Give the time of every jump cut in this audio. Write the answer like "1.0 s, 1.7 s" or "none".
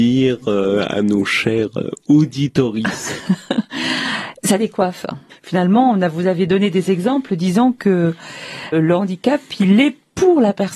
5.3 s, 8.7 s